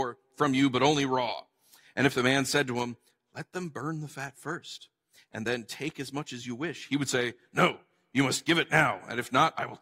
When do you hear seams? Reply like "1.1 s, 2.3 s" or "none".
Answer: none